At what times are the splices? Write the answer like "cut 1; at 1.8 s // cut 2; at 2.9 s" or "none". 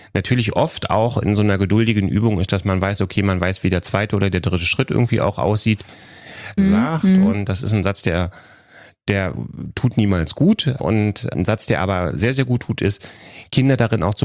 cut 1; at 6.6 s